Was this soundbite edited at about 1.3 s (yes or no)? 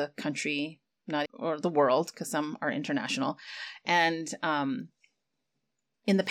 yes